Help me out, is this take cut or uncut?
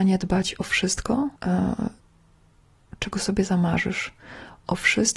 cut